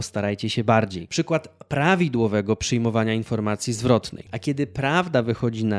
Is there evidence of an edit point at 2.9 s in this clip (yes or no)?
no